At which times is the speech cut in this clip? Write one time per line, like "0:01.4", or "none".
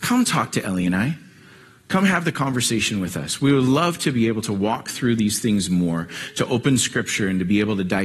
none